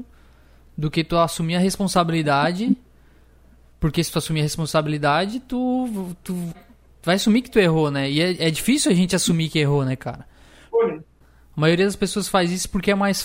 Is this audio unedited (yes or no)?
no